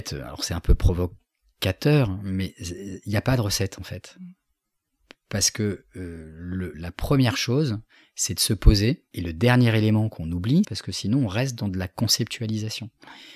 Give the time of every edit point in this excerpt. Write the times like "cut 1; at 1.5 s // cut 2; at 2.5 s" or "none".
cut 1; at 6.7 s // cut 2; at 9.1 s // cut 3; at 10.6 s